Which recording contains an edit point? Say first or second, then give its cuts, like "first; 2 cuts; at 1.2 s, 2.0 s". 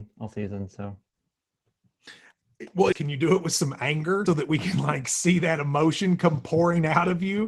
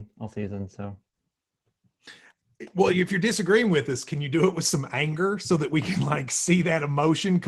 first; 2 cuts; at 2.9 s, 4.3 s